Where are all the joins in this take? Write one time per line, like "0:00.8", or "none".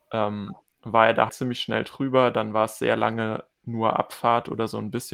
0:01.3